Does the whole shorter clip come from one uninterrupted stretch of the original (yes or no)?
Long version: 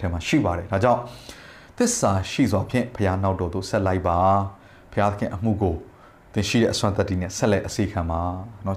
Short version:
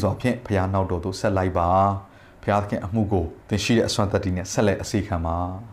no